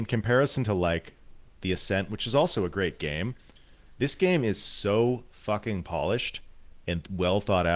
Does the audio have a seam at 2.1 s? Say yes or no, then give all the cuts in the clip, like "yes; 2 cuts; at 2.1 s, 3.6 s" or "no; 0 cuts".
no; 0 cuts